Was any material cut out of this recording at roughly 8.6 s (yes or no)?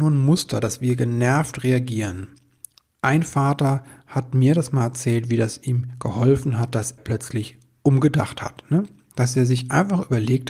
no